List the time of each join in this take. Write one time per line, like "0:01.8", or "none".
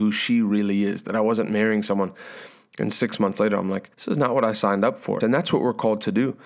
0:03.9
0:05.2

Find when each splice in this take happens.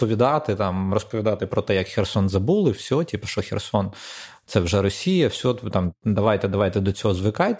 none

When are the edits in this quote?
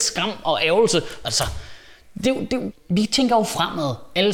0:01.2
0:02.7

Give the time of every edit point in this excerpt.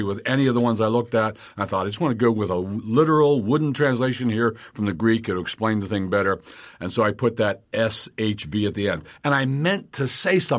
none

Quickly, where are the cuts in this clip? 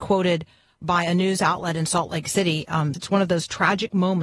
0:02.9

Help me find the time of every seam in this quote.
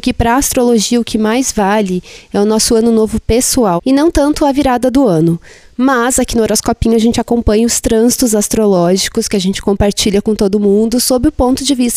0:03.8

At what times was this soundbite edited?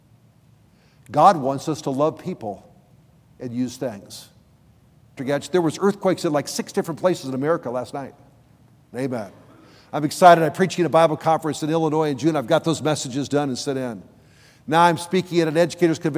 0:05.2
0:08.9

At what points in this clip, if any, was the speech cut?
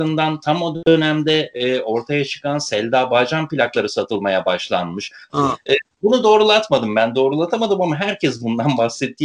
0:05.3

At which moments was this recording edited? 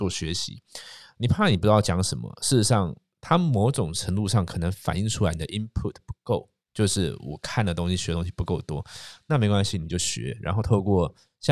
none

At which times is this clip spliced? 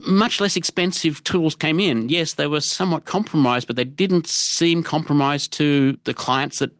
none

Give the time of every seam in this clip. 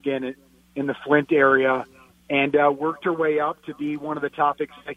none

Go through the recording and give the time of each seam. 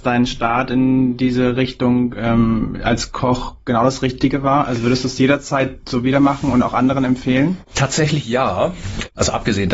none

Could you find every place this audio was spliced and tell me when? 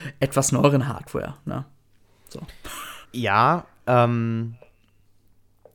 0:03.1

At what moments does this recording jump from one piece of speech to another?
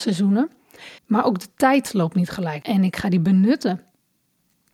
0:01.0
0:02.6

